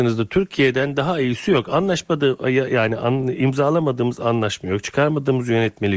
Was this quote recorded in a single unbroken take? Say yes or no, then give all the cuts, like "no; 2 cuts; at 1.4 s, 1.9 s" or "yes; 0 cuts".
yes; 0 cuts